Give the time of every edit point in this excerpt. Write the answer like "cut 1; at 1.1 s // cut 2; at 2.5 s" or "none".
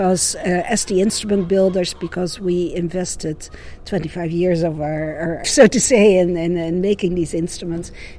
cut 1; at 5.4 s